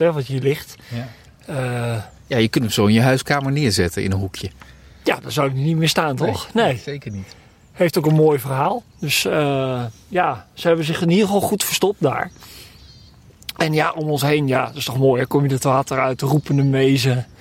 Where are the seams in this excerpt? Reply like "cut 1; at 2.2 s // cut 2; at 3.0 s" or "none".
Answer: cut 1; at 8.8 s